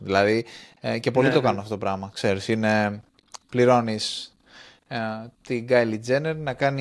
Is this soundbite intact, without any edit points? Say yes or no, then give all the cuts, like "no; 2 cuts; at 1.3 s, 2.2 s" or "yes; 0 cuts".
yes; 0 cuts